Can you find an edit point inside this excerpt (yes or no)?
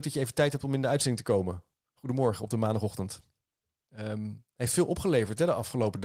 yes